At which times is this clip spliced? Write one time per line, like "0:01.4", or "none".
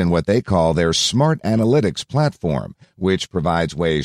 none